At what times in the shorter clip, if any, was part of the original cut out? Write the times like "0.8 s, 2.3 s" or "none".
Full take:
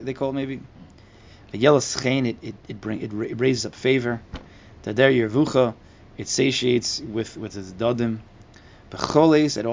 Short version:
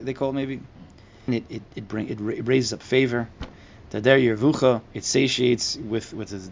1.3 s, 4.9 s